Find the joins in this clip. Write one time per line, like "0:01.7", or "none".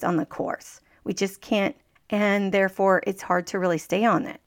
0:02.0